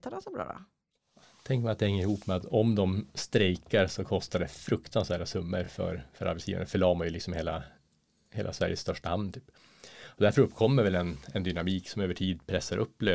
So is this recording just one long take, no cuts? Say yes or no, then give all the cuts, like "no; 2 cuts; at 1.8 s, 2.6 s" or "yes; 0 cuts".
yes; 0 cuts